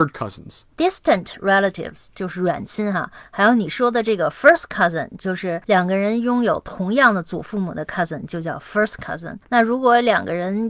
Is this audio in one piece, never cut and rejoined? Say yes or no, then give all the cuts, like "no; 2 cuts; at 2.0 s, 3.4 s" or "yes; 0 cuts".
yes; 0 cuts